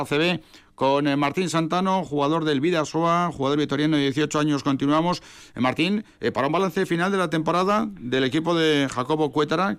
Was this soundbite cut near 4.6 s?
no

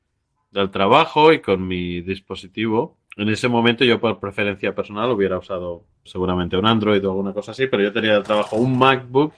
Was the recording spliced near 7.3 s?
no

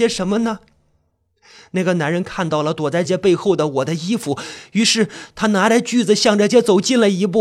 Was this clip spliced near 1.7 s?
no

